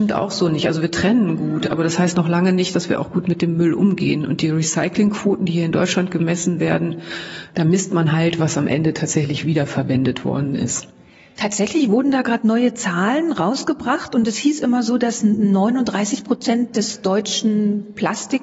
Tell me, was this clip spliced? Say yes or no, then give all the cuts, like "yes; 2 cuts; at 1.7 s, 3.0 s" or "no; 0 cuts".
yes; 1 cut; at 8.4 s